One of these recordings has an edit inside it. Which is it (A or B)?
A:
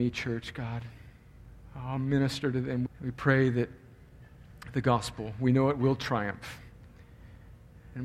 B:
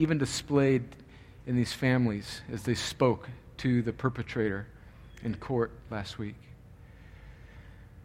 A